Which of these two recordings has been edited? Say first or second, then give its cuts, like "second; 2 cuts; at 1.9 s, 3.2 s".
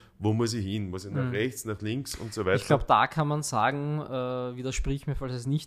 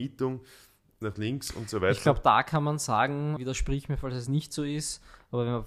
second; 2 cuts; at 1.0 s, 3.4 s